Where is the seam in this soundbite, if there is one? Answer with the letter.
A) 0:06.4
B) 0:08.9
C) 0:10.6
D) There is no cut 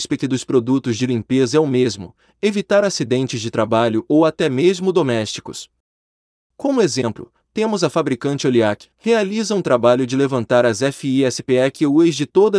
B